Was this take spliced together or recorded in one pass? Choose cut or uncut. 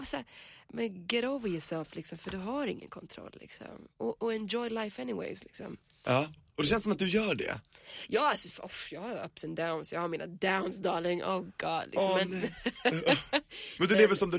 uncut